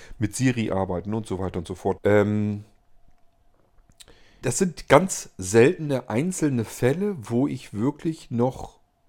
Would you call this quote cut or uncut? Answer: cut